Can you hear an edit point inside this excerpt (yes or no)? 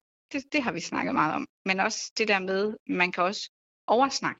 no